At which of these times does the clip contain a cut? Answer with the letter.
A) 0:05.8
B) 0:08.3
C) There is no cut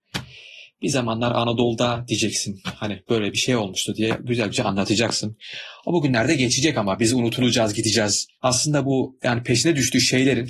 C